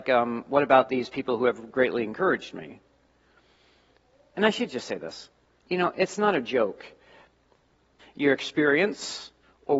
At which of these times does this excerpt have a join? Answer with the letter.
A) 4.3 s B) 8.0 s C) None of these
B